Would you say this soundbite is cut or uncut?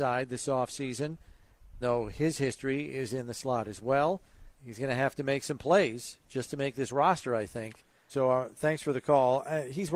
cut